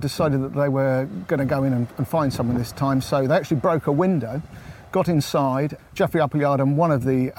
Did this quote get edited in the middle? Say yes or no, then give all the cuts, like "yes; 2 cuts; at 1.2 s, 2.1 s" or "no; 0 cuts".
yes; 1 cut; at 5.8 s